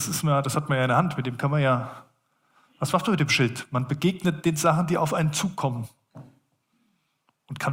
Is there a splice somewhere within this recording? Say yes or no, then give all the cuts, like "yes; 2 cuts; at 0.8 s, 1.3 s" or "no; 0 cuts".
no; 0 cuts